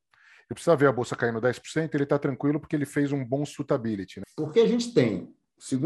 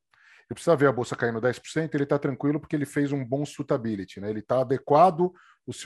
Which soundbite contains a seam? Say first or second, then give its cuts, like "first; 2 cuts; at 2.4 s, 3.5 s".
first; 1 cut; at 4.2 s